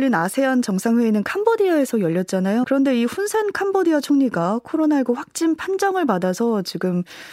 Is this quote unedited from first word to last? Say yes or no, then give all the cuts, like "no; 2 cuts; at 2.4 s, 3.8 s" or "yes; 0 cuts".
no; 1 cut; at 2.6 s